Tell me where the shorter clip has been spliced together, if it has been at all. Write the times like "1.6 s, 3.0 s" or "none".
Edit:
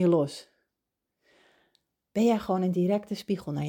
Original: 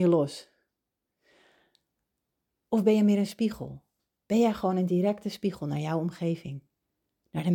1.9 s